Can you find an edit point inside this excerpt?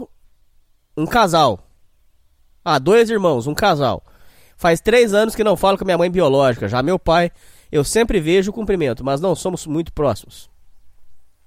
no; 0 cuts

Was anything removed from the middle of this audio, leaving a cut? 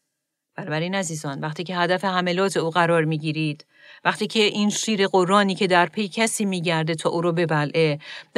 no; 0 cuts

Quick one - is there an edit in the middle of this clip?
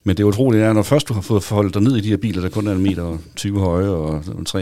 no; 0 cuts

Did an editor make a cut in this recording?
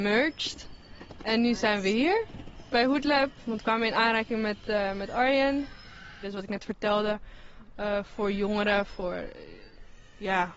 yes; 1 cut; at 6.2 s

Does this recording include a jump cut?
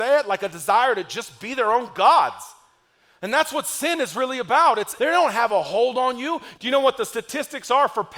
yes; 2 cuts; at 5.0 s, 6.5 s

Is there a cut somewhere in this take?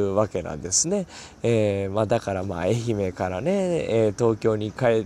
no; 0 cuts

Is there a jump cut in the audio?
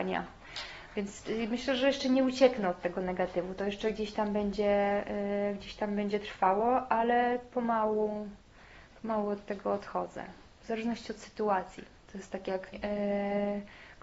yes; 1 cut; at 12.7 s

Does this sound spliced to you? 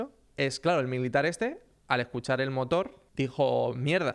yes; 1 cut; at 3.1 s

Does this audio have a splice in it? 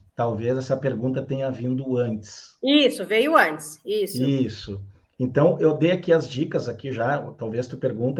no; 0 cuts

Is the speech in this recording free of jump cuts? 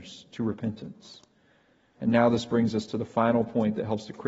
no; 1 cut; at 2.0 s

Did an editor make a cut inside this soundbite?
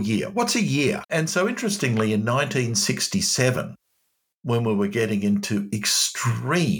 yes; 1 cut; at 1.0 s

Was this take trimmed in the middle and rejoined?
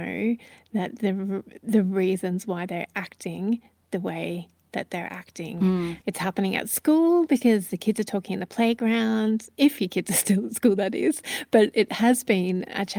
yes; 1 cut; at 6.0 s

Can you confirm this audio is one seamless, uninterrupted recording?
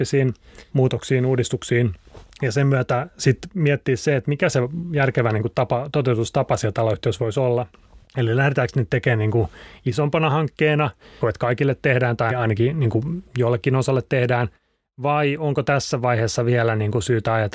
no; 2 cuts; at 11.2 s, 12.3 s

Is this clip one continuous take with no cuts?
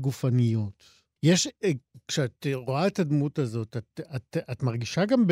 no; 1 cut; at 1.2 s

